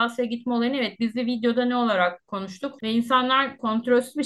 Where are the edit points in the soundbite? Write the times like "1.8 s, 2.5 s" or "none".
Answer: 2.8 s